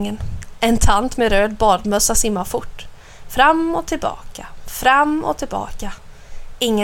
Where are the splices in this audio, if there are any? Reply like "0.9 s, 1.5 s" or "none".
none